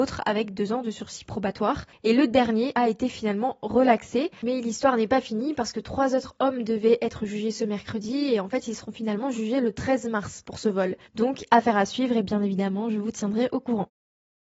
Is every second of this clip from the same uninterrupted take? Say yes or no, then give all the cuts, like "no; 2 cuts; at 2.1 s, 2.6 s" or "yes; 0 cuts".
no; 1 cut; at 11.1 s